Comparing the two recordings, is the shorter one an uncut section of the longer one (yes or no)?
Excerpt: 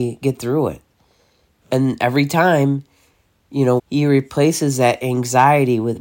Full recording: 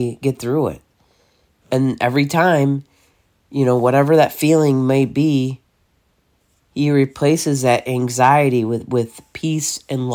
no